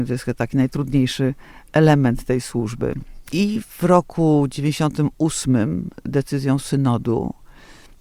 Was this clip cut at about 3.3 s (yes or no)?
yes